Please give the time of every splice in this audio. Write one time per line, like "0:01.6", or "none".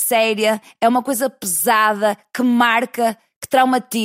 none